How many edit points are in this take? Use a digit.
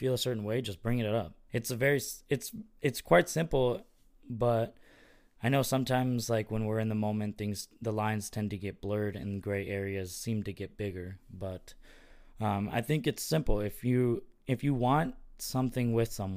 1